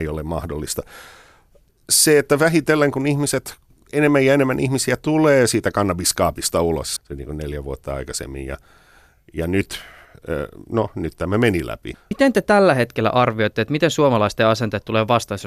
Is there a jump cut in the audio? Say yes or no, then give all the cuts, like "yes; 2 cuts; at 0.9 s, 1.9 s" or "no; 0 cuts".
yes; 2 cuts; at 7.0 s, 11.9 s